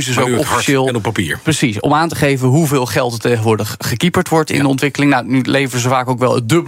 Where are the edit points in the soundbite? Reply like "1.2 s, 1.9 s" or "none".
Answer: none